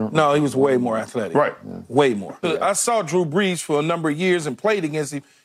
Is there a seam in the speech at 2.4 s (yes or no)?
yes